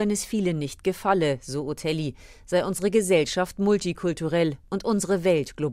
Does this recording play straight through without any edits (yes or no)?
yes